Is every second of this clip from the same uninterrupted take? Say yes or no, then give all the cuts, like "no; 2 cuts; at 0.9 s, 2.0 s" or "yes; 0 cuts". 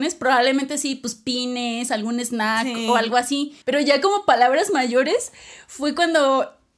no; 1 cut; at 3.6 s